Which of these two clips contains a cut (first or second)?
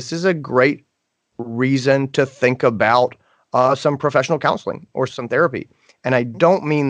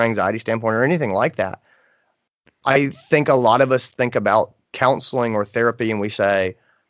first